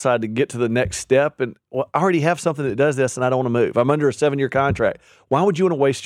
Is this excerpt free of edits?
yes; 0 cuts

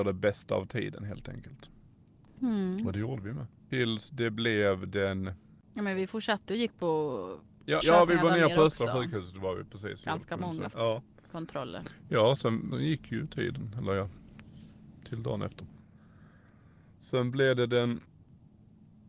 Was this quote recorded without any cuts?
no; 3 cuts; at 7.8 s, 10.7 s, 12.7 s

